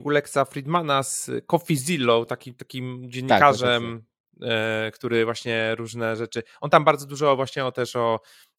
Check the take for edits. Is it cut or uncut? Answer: uncut